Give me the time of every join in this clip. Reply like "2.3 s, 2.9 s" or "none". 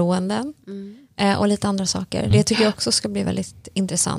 none